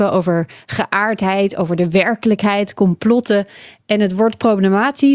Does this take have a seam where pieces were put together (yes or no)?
no